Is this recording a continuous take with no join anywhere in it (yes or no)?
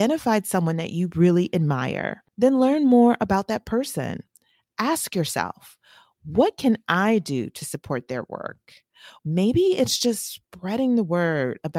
no